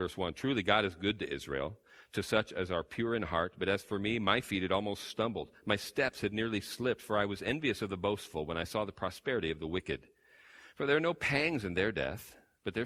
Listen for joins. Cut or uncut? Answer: uncut